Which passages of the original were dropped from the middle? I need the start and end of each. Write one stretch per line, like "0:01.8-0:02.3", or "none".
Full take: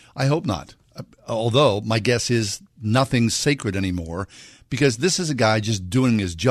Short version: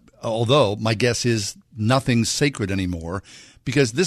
none